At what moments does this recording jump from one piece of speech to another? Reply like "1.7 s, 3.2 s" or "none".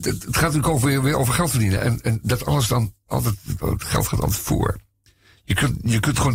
3.6 s

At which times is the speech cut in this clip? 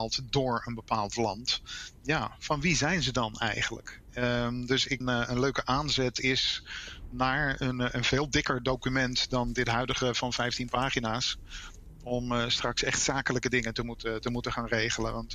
5.0 s

